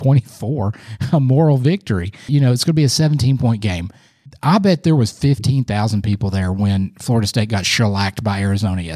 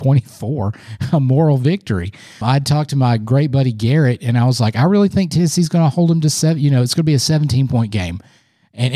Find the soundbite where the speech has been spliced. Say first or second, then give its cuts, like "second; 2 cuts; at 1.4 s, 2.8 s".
first; 2 cuts; at 2.3 s, 4.3 s